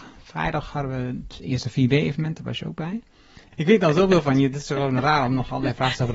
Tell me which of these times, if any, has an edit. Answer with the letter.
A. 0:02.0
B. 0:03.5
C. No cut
B